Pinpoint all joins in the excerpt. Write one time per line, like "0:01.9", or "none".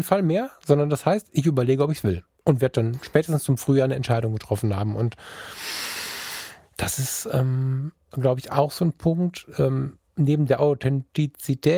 none